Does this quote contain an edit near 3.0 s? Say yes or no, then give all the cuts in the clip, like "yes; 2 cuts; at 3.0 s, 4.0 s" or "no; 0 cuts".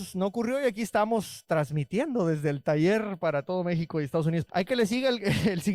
no; 1 cut; at 4.5 s